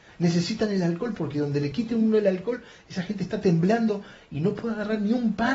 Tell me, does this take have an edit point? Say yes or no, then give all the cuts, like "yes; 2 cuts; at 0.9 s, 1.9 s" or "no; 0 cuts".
no; 0 cuts